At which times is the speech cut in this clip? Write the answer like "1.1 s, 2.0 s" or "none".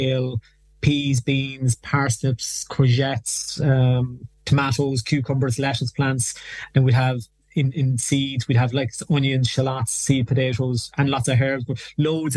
none